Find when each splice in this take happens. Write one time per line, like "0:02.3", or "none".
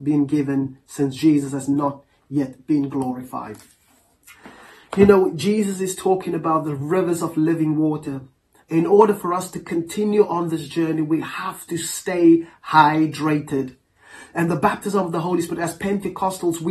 none